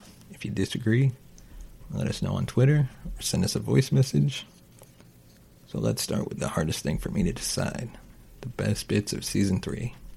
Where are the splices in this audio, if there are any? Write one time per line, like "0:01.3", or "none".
0:06.4